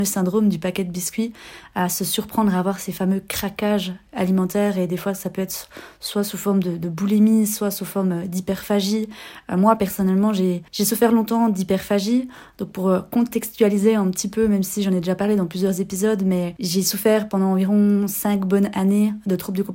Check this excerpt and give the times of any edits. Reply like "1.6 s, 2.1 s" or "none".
10.7 s